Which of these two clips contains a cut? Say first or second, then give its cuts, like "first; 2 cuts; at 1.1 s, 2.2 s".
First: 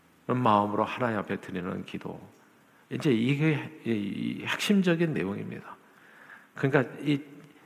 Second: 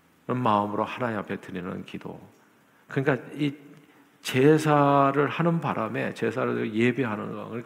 second; 1 cut; at 2.8 s